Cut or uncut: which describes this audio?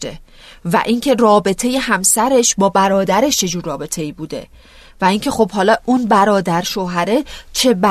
uncut